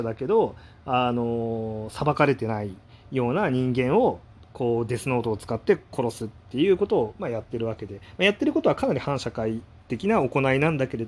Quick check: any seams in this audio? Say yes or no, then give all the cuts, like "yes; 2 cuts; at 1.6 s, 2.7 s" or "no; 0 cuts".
no; 0 cuts